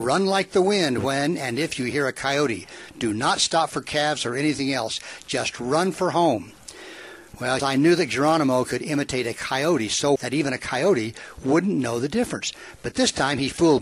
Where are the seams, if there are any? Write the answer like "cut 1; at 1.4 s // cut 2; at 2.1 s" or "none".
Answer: cut 1; at 7.6 s // cut 2; at 10.2 s